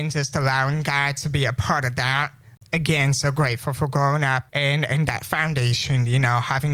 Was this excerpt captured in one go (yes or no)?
yes